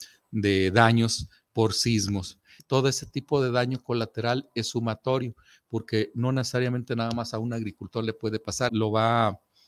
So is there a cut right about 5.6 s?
no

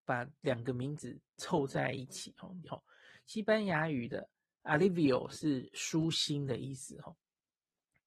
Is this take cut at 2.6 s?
yes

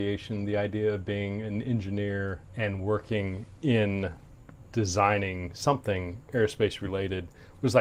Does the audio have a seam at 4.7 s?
no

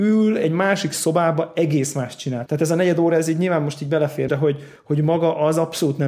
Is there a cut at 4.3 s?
yes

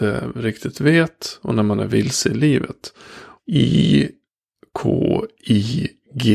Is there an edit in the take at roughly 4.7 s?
no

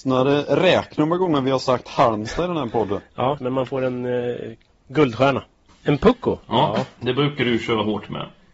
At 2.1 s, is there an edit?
no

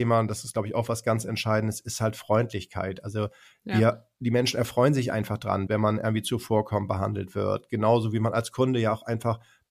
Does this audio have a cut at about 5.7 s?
yes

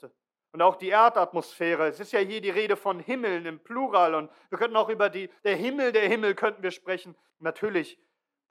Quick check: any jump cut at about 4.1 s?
no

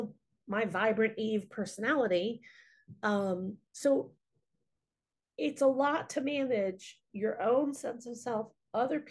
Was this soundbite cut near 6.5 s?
no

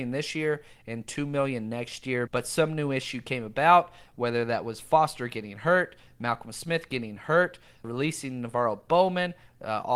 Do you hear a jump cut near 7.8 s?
yes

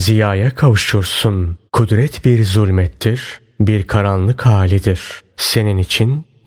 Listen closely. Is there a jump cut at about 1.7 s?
yes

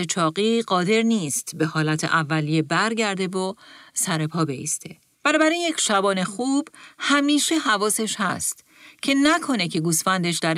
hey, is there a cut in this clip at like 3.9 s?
no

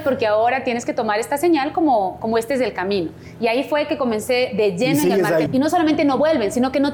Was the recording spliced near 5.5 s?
yes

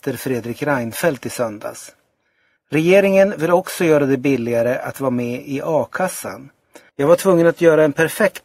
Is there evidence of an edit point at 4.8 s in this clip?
no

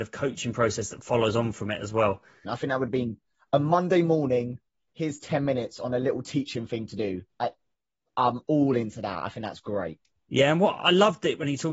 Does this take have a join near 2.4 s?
yes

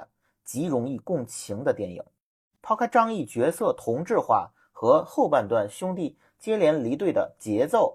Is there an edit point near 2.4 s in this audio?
no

